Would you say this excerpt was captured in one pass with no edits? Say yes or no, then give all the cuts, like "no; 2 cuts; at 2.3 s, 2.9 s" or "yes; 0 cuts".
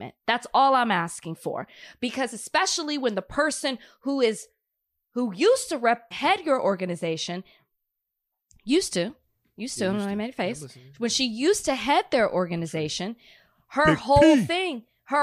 no; 1 cut; at 6.1 s